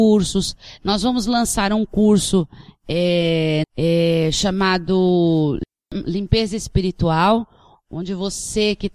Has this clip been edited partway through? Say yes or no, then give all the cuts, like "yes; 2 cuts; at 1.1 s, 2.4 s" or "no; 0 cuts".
yes; 2 cuts; at 3.6 s, 7.8 s